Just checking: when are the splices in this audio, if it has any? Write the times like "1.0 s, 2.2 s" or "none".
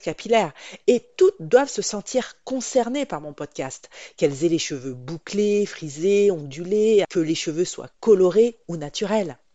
7.0 s

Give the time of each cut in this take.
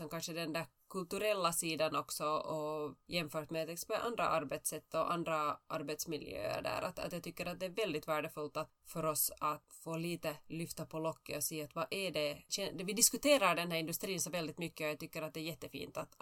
none

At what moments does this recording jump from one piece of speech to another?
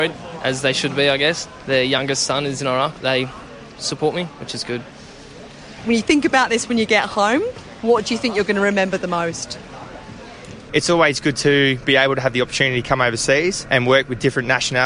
3.0 s, 10.7 s

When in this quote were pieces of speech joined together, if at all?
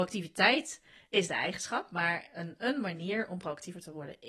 none

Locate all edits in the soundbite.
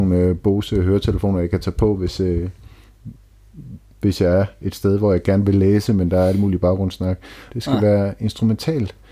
7.5 s

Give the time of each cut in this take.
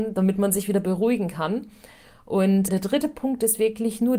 2.7 s

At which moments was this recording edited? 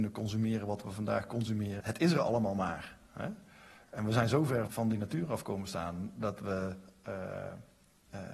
1.8 s, 4.7 s

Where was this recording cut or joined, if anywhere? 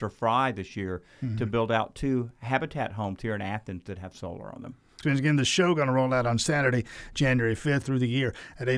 5.0 s, 7.8 s

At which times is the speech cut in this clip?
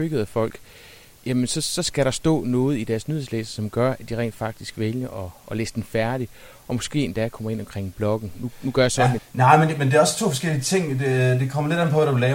9.2 s

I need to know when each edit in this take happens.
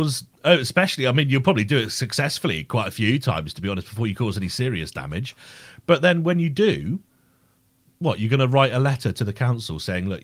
none

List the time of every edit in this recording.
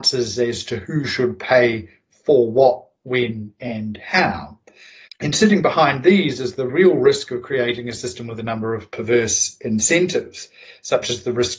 5.1 s, 6.7 s

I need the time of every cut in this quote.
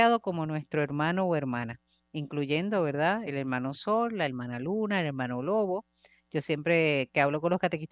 none

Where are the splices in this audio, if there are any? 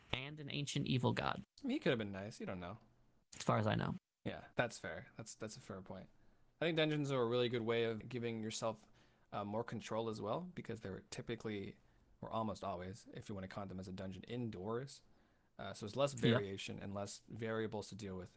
4.5 s

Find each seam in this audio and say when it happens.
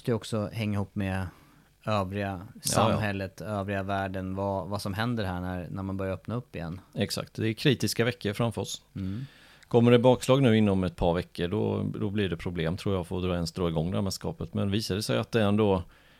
none

